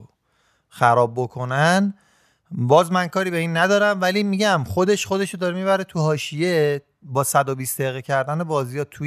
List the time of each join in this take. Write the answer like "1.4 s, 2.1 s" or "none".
none